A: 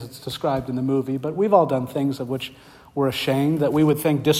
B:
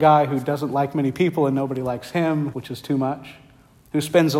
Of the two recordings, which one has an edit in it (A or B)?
B